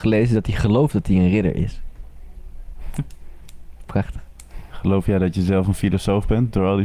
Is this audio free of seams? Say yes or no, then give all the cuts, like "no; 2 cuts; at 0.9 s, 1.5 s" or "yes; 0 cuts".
yes; 0 cuts